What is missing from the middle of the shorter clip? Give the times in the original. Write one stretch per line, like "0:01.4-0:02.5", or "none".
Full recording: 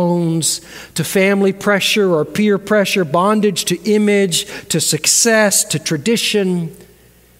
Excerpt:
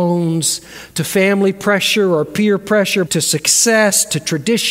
0:03.1-0:04.6